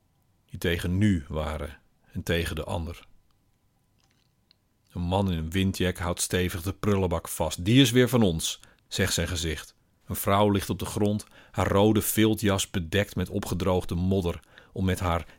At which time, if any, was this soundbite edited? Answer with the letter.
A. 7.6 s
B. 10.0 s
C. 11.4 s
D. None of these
B